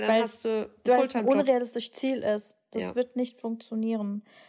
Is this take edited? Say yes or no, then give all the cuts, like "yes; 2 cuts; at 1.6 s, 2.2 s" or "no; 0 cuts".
no; 0 cuts